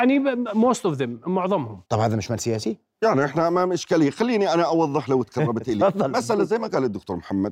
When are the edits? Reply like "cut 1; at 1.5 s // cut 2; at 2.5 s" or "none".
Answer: cut 1; at 1.8 s